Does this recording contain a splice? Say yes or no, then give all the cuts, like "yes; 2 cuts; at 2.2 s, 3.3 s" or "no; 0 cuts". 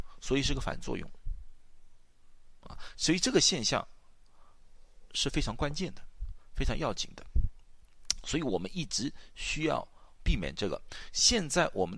no; 0 cuts